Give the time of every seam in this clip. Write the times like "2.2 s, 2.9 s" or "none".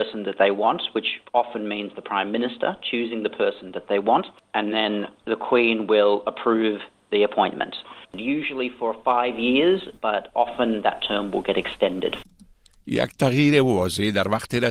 none